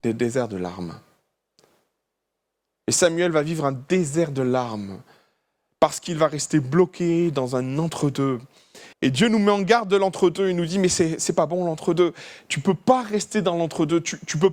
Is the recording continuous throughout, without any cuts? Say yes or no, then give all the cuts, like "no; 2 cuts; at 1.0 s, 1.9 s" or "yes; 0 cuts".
no; 1 cut; at 8.9 s